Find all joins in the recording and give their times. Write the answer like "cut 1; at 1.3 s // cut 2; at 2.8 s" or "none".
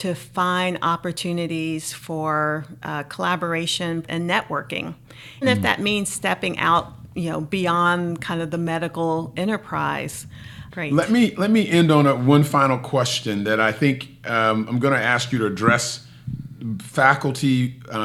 cut 1; at 4.0 s // cut 2; at 5.4 s // cut 3; at 10.7 s